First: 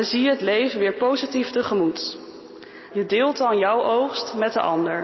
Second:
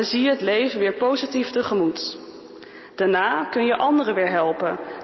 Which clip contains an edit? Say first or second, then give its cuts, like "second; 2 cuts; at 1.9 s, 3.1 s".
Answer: first; 1 cut; at 2.9 s